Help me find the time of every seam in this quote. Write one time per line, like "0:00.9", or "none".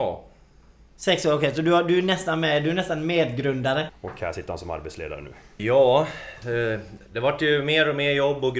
0:03.9
0:05.6